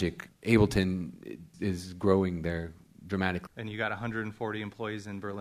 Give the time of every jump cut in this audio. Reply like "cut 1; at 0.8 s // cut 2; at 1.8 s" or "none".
cut 1; at 1.5 s // cut 2; at 3.5 s